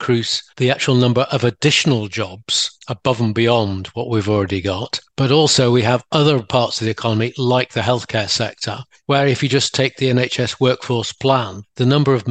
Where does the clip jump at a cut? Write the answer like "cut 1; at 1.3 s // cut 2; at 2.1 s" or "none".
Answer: none